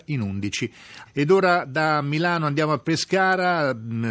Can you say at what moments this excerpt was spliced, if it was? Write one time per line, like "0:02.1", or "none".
0:01.0

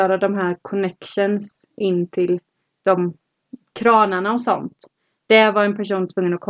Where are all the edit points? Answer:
none

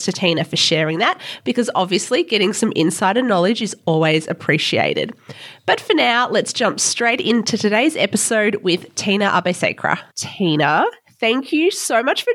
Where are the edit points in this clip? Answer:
0:10.1

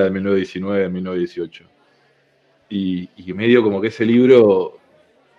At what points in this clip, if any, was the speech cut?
none

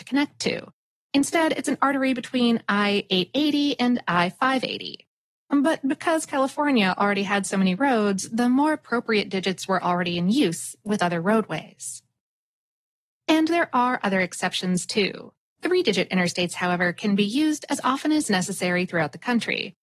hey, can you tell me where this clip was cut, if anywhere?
0:15.6

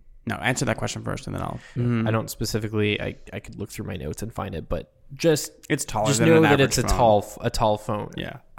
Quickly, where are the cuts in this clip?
0:01.8
0:05.9

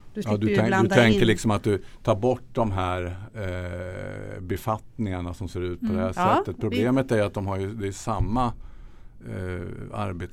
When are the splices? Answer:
none

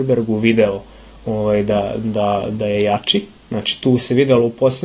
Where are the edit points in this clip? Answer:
none

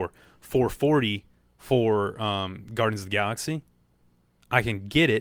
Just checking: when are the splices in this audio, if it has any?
none

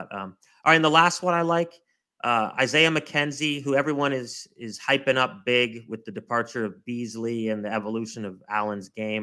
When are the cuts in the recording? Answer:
none

